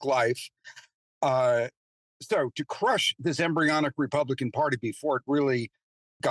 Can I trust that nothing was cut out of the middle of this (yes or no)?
yes